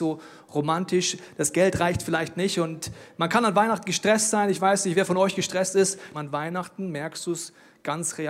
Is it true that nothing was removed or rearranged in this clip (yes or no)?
no